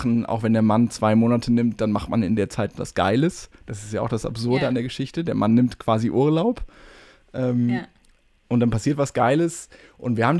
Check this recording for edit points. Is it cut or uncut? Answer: uncut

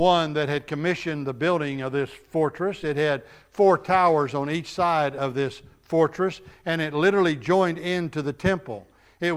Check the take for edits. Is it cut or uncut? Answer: uncut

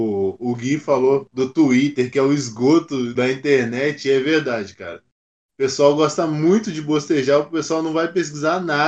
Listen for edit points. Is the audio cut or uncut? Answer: uncut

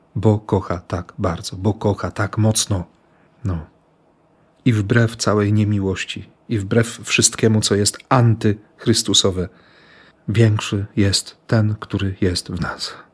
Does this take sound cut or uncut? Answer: uncut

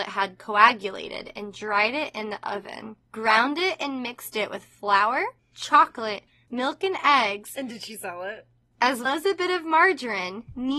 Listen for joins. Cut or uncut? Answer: cut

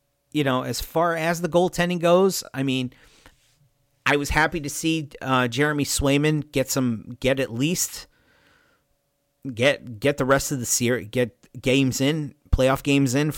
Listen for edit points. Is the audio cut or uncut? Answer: uncut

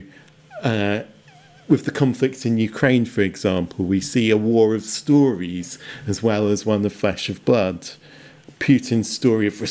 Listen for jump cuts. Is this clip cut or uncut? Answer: uncut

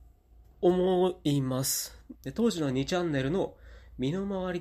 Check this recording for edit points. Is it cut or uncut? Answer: cut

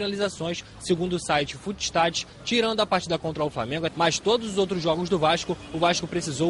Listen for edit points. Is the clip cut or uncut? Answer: cut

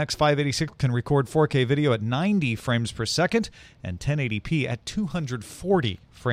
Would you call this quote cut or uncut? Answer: uncut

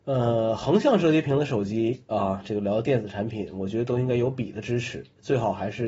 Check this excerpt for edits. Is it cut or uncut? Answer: uncut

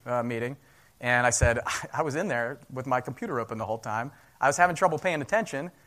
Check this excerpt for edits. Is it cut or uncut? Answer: uncut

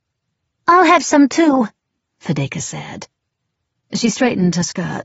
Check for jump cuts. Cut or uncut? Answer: cut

